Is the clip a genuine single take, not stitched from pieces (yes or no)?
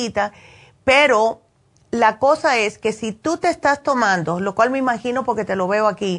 yes